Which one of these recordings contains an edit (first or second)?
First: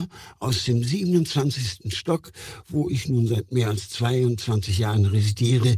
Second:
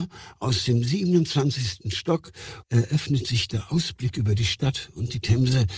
second